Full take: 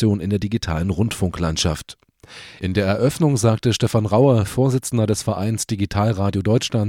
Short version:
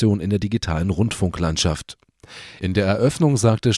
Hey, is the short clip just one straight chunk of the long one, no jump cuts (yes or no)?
yes